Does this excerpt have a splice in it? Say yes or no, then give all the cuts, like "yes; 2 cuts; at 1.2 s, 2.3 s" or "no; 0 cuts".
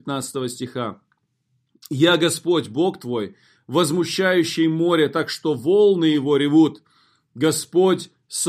no; 0 cuts